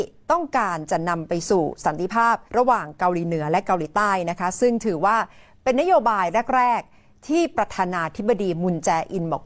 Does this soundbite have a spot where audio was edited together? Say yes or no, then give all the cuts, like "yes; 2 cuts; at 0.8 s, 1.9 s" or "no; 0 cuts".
yes; 1 cut; at 2.5 s